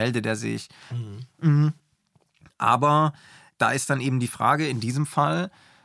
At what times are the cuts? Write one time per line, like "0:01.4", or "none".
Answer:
0:00.9